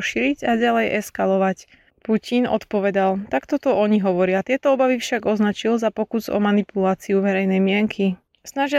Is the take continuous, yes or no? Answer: yes